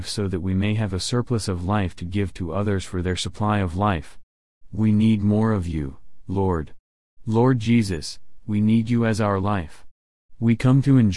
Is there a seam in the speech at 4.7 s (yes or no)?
no